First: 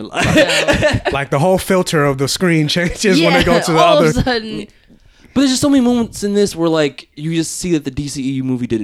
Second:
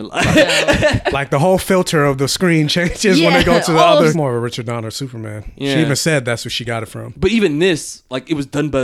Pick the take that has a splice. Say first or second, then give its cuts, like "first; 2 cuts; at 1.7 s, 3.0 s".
second; 1 cut; at 4.1 s